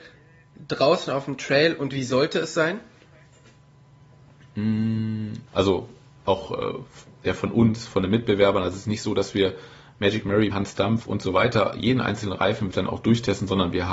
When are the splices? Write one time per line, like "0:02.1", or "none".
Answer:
0:05.5
0:10.5
0:12.7

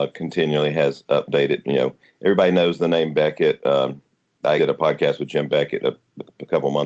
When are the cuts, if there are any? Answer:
0:04.6

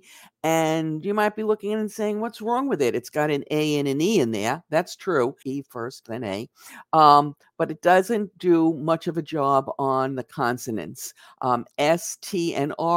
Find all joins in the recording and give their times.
0:05.4

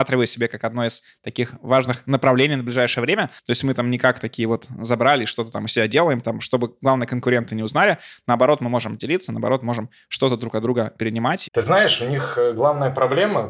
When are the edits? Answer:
0:03.4
0:11.5

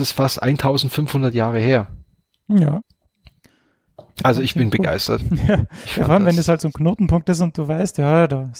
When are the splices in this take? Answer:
none

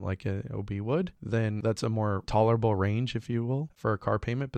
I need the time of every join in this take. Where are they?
none

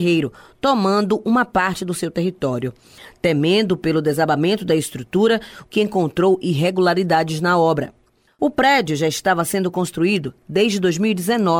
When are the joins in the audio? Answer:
0:05.6

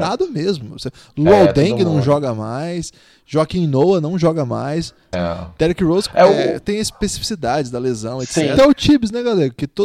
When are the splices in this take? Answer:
0:05.1
0:08.6

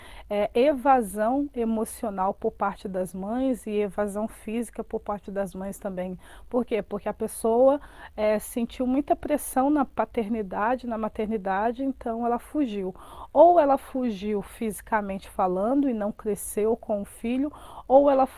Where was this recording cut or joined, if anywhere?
none

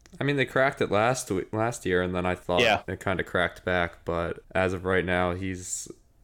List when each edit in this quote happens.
0:02.4
0:04.4

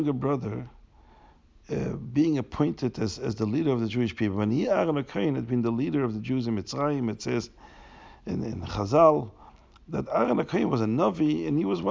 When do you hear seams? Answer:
none

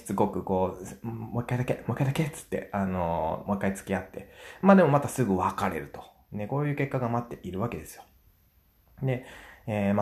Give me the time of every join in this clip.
none

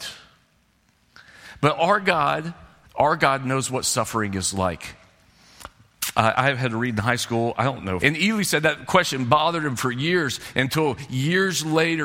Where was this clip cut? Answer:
0:02.8
0:08.0

